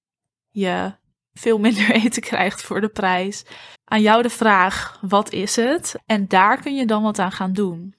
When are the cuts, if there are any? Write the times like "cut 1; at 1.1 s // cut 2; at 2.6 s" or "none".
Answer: cut 1; at 3.7 s // cut 2; at 6.0 s